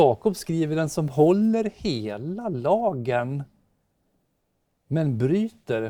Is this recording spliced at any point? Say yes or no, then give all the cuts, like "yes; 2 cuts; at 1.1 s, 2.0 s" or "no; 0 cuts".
no; 0 cuts